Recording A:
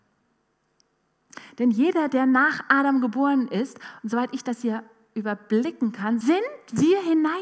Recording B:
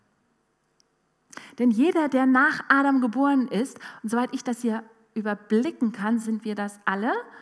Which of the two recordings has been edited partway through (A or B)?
A